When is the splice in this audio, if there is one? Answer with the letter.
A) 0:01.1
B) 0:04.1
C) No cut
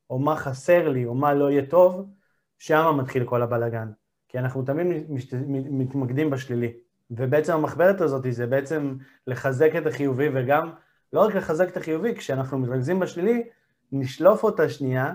C